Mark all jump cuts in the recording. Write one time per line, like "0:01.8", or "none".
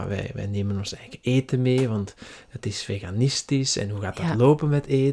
none